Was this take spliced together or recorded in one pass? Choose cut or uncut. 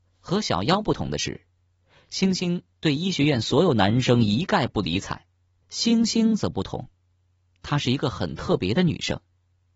cut